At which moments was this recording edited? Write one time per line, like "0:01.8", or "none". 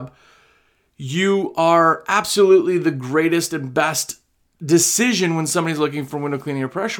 none